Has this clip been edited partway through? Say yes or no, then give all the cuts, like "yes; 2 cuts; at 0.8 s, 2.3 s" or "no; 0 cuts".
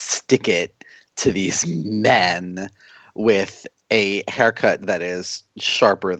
no; 0 cuts